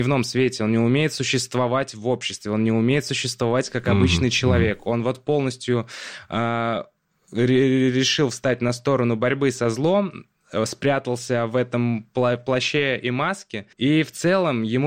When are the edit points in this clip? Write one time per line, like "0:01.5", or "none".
0:13.7